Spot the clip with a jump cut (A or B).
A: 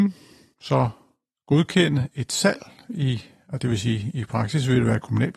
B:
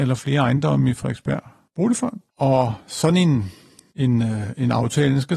B